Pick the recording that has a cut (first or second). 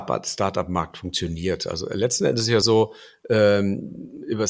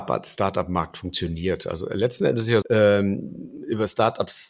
second